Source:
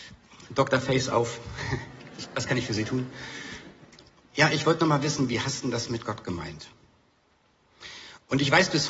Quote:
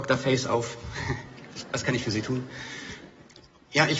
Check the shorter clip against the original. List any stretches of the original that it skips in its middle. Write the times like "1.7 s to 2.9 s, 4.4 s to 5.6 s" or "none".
none